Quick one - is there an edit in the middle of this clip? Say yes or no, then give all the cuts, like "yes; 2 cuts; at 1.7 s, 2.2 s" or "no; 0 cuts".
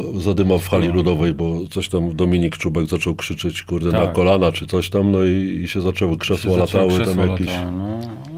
no; 0 cuts